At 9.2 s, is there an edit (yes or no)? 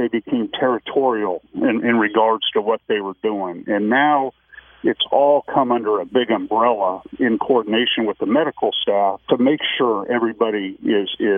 yes